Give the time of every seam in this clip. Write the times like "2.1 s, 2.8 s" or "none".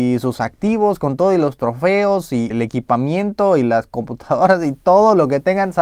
2.5 s